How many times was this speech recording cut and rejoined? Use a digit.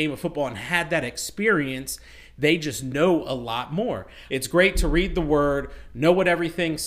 1